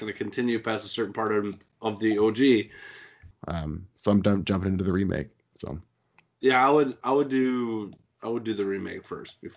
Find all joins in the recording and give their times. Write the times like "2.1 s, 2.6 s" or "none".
3.3 s